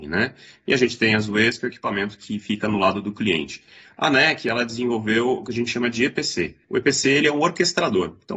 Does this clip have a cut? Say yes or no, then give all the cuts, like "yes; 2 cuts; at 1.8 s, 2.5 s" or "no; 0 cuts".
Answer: yes; 1 cut; at 6.6 s